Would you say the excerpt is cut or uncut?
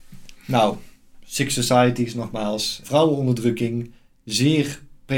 uncut